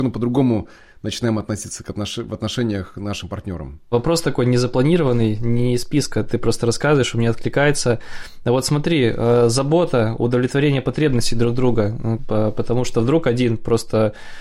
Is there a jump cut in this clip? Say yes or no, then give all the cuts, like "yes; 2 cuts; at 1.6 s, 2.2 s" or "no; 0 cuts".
yes; 1 cut; at 12.2 s